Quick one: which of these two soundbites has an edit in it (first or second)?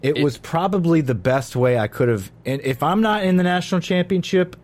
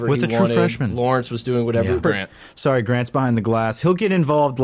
second